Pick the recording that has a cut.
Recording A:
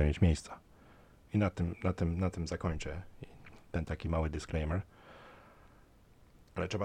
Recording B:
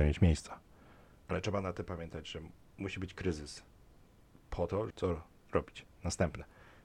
B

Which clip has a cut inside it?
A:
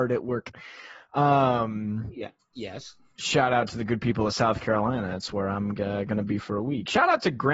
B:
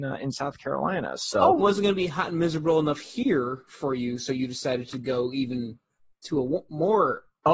B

